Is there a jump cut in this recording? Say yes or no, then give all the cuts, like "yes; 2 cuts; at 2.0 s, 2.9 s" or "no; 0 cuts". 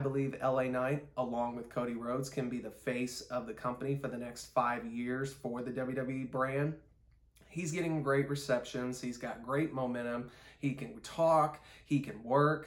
no; 0 cuts